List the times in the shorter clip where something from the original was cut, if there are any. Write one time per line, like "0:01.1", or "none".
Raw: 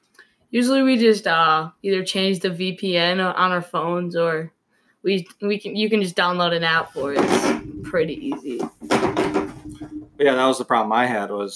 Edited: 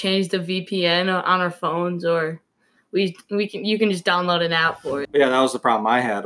0:05.0